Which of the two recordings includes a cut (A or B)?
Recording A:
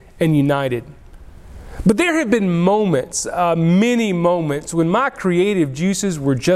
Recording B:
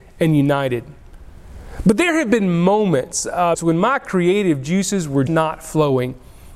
B